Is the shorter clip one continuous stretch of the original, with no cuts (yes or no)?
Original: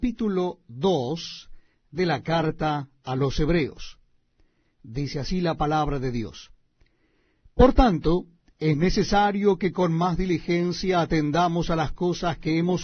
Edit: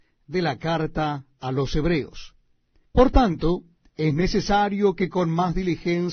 no